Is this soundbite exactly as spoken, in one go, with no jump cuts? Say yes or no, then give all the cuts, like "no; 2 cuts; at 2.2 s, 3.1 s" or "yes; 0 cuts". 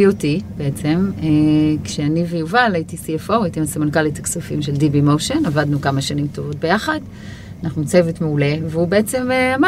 yes; 0 cuts